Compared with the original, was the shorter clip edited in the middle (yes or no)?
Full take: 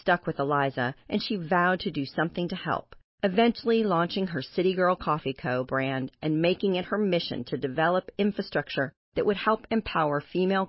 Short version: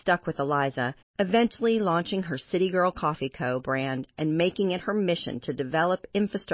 yes